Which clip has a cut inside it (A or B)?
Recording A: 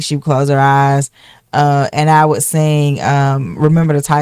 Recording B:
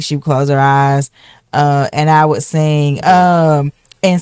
B